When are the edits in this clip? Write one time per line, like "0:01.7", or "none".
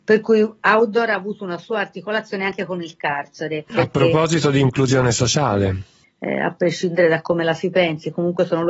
0:03.7
0:06.0